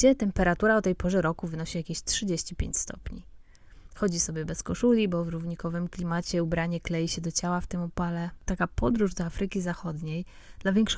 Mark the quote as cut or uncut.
cut